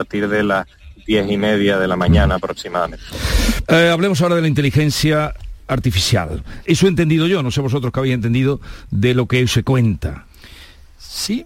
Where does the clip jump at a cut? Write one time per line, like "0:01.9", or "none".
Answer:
0:03.6
0:06.6